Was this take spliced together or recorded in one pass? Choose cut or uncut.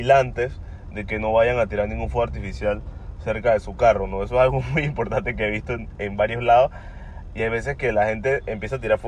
uncut